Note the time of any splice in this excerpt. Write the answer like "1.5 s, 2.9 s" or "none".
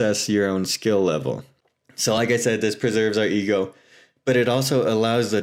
none